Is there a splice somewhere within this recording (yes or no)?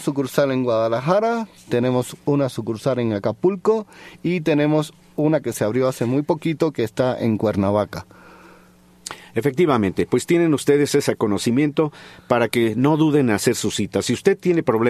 yes